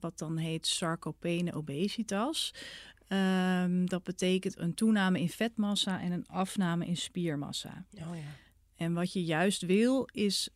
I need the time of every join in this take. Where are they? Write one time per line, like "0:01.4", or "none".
none